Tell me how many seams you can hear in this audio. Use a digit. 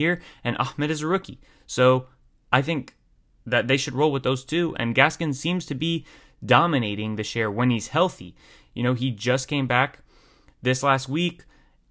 0